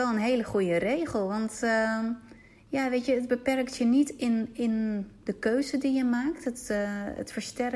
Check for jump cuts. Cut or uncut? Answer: uncut